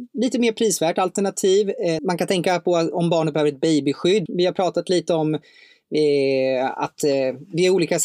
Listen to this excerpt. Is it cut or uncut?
cut